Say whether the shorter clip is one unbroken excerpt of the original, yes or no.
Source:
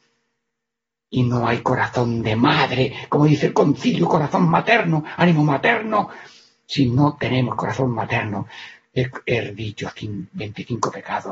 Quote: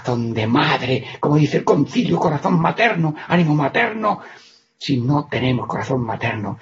yes